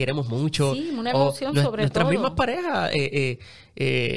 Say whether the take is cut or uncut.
uncut